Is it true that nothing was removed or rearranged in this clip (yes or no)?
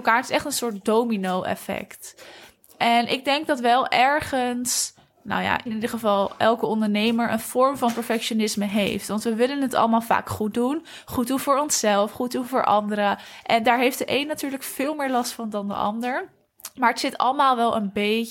no